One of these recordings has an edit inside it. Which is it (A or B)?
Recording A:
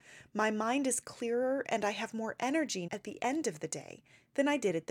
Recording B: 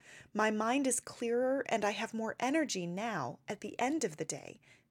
A